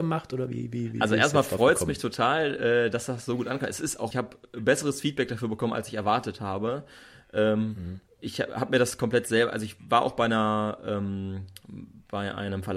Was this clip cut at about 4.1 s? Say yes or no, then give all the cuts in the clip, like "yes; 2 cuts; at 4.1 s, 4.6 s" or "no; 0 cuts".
yes; 1 cut; at 4.1 s